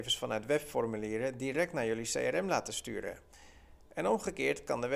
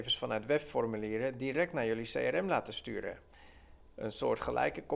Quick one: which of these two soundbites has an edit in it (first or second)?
second